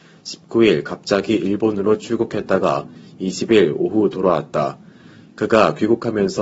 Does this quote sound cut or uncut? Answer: uncut